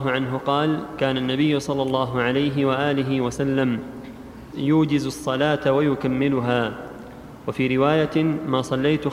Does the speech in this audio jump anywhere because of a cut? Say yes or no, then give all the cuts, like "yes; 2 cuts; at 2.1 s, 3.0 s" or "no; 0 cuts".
yes; 1 cut; at 4.5 s